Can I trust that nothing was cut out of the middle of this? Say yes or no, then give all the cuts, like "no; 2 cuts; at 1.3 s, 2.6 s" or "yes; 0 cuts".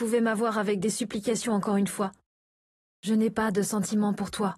yes; 0 cuts